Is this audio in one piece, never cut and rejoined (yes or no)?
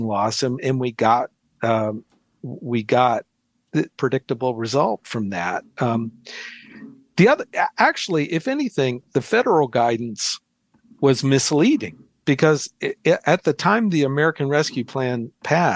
no